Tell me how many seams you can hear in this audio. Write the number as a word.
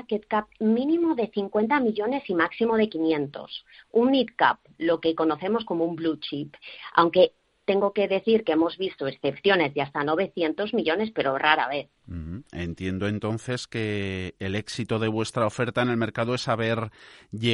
one